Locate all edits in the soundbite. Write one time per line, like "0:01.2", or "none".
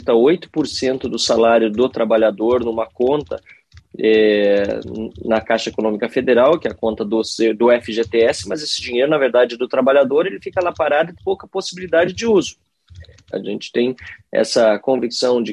0:11.2
0:13.3